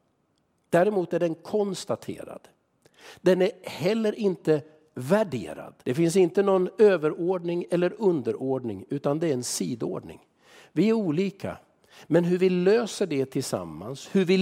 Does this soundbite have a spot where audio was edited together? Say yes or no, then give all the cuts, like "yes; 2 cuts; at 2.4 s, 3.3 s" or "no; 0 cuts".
yes; 1 cut; at 5.8 s